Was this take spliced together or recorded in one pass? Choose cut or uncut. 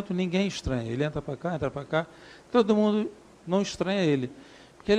uncut